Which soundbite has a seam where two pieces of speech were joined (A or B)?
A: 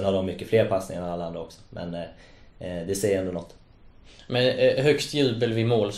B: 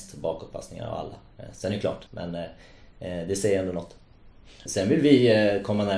B